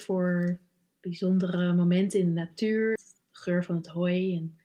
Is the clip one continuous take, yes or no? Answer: no